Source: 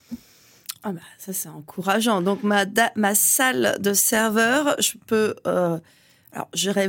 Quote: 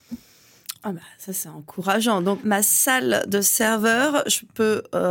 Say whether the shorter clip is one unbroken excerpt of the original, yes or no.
no